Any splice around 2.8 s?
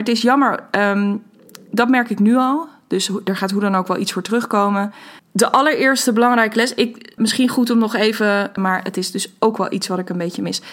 no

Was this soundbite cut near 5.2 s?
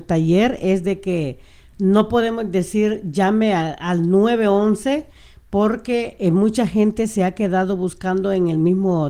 no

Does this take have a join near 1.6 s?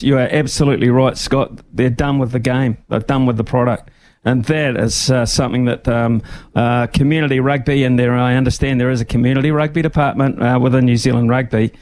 no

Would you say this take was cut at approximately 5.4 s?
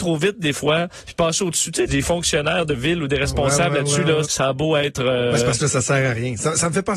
no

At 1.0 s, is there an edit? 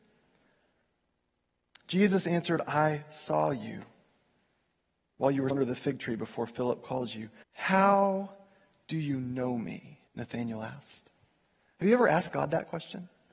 no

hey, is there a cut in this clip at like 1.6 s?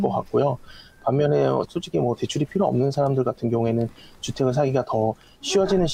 yes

